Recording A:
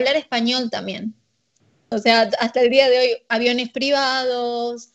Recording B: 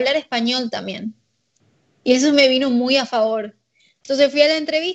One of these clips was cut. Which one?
A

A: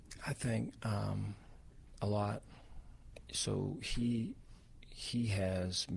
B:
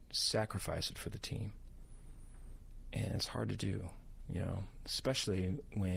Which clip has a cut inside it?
A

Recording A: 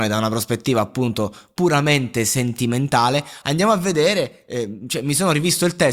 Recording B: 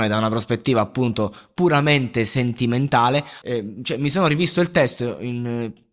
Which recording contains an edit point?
B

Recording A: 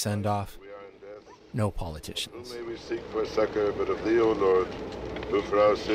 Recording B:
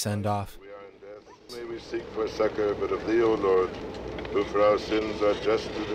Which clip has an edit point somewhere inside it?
B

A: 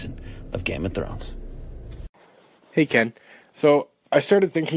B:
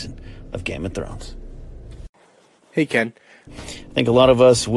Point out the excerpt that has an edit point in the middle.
B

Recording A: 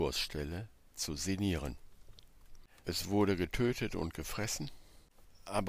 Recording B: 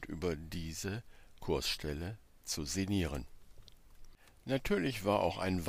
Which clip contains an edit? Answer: A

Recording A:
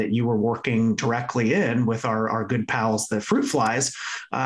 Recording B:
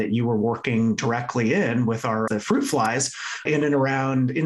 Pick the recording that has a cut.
B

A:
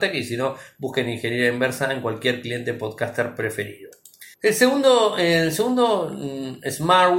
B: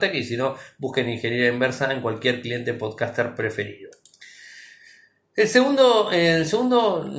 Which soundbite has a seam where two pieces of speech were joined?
A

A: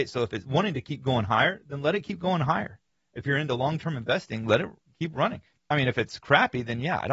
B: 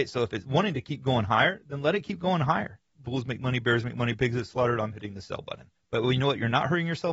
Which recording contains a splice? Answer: B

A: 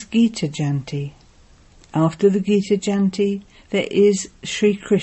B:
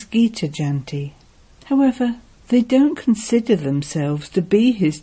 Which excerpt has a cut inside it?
B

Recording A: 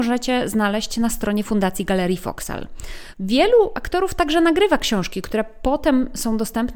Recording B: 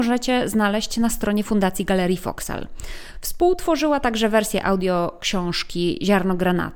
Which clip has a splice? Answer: A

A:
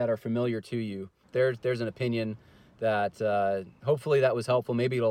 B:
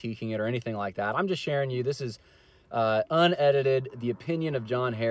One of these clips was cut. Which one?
A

